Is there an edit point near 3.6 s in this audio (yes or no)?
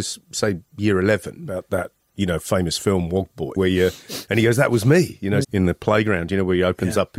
yes